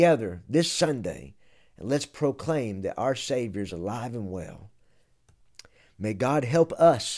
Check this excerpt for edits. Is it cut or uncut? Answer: uncut